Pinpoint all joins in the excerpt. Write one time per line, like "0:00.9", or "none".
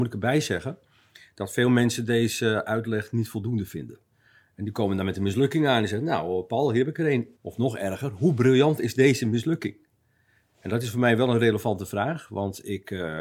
0:07.4